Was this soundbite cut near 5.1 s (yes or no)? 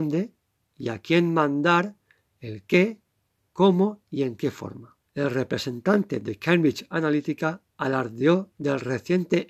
yes